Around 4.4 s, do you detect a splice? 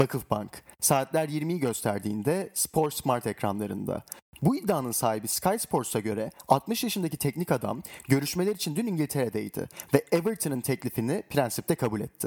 yes; 1 cut; at 4.4 s

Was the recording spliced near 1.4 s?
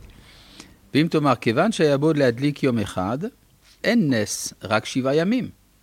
no; 1 cut; at 3.8 s

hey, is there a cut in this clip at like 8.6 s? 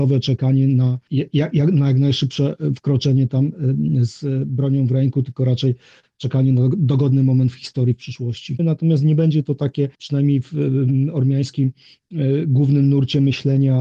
yes; 2 cuts; at 8.6 s, 9.9 s

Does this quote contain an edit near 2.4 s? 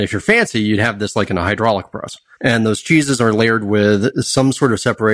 yes; 1 cut; at 2.4 s

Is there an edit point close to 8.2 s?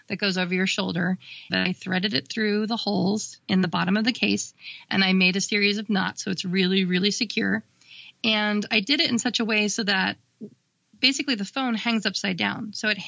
no; 1 cut; at 1.5 s

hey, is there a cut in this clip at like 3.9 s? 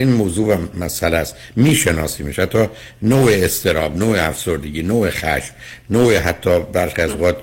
no; 0 cuts

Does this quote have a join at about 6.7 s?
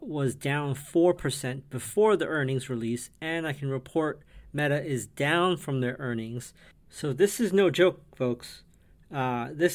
yes; 1 cut; at 6.7 s

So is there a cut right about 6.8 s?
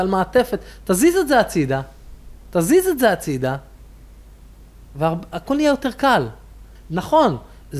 yes; 1 cut; at 6.8 s

